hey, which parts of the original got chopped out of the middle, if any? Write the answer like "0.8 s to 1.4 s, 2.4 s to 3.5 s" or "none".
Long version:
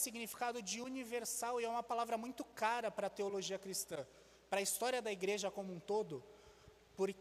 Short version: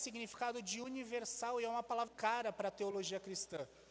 2.1 s to 2.5 s